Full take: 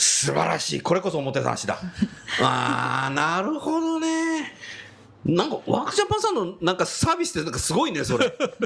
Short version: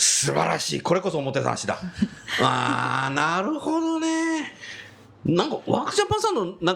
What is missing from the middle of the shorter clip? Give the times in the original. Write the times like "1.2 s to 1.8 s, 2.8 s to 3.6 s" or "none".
none